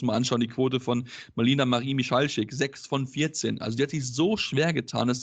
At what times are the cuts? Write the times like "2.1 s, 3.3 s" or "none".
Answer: none